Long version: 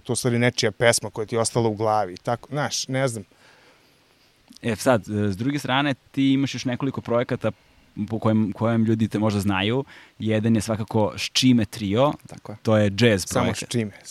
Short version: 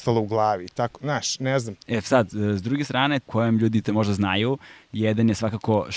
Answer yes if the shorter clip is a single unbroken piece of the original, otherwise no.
no